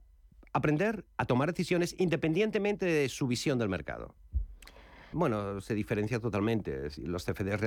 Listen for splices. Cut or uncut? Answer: cut